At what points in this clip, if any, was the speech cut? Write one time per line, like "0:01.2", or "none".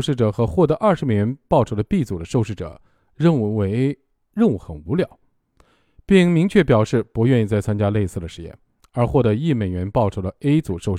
none